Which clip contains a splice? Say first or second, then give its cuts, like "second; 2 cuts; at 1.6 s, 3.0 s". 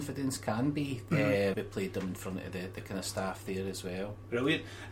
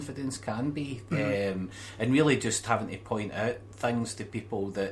first; 1 cut; at 1.5 s